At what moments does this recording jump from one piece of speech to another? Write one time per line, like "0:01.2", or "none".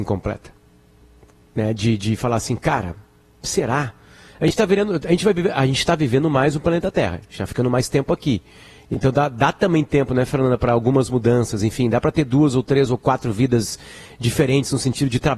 none